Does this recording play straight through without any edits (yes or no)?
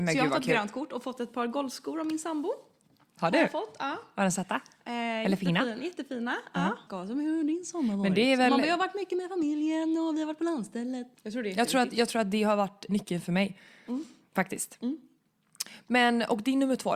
no